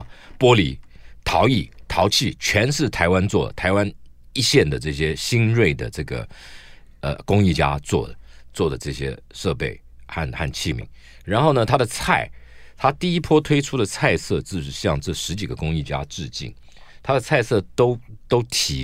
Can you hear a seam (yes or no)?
no